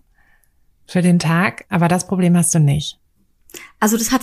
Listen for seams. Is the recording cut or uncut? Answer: uncut